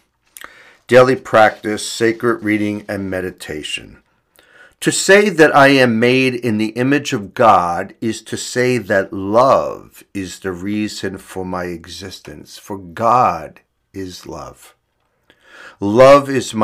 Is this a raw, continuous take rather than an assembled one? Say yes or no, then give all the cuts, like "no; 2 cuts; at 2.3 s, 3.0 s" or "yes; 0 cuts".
yes; 0 cuts